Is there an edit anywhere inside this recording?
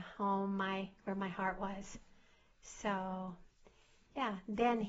no; 0 cuts

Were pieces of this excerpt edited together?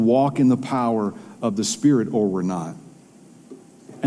no; 0 cuts

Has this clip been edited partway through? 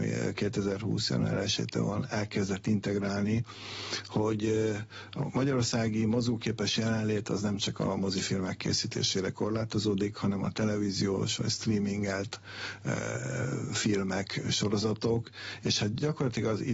no; 0 cuts

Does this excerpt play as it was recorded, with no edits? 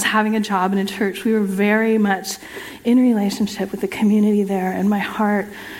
yes; 0 cuts

